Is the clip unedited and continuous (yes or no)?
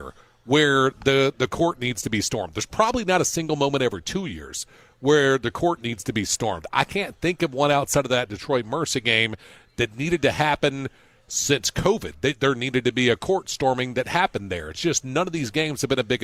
yes